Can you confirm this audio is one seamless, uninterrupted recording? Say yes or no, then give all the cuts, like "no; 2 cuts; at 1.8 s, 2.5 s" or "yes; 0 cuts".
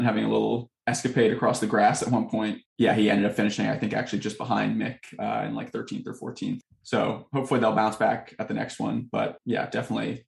yes; 0 cuts